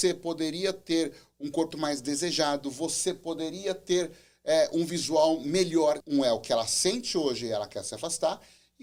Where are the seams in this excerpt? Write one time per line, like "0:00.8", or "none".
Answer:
0:01.7
0:06.0